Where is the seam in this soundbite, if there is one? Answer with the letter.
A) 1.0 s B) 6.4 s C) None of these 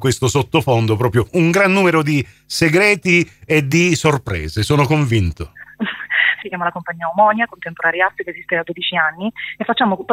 B